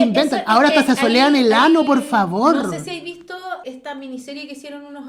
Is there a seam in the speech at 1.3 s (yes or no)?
no